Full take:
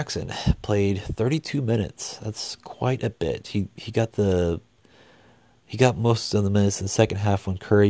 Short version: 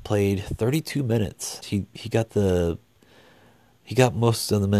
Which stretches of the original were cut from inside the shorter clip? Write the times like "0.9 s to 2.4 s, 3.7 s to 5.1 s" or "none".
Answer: 2.2 s to 3.4 s